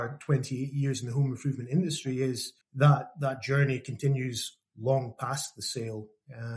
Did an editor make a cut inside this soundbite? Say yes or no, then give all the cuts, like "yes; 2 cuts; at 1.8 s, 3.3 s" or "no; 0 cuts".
yes; 1 cut; at 2.6 s